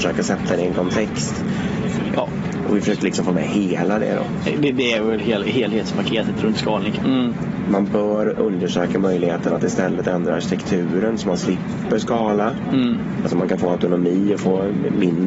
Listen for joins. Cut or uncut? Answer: cut